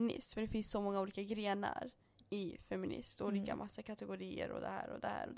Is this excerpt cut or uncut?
uncut